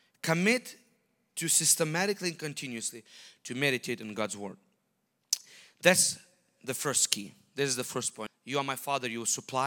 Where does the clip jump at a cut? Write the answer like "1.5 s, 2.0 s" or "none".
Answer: 8.3 s